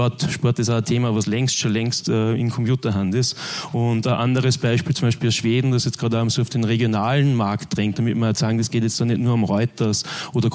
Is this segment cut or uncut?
uncut